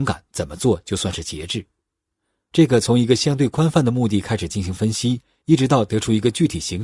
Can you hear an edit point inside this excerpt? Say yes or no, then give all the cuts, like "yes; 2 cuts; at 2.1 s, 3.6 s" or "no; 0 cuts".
no; 0 cuts